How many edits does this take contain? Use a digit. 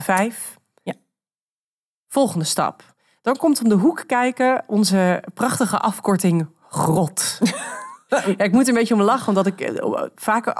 0